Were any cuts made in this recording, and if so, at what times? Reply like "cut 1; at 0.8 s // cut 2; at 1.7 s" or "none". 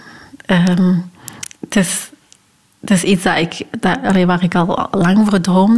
cut 1; at 1.5 s